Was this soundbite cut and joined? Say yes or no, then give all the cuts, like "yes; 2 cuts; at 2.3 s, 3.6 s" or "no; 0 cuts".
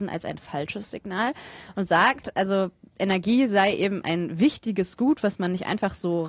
no; 0 cuts